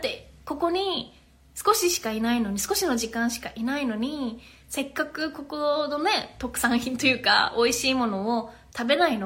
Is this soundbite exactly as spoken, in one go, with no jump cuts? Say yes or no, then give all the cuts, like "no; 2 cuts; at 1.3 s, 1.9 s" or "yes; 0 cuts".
yes; 0 cuts